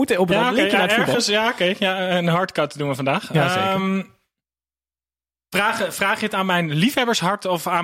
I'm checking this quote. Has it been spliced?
no; 0 cuts

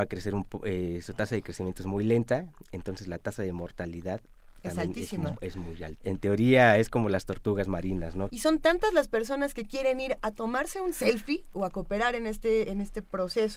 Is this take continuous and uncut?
no; 3 cuts; at 6.0 s, 8.3 s, 11.5 s

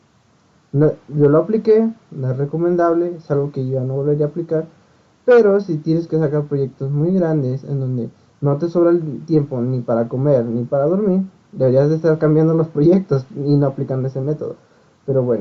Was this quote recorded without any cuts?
yes; 0 cuts

